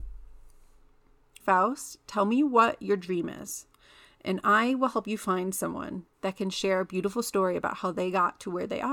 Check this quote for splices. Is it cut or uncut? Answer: cut